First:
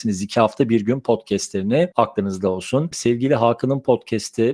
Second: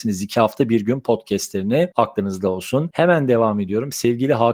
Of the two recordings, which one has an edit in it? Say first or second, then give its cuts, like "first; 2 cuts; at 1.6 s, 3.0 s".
first; 1 cut; at 2.9 s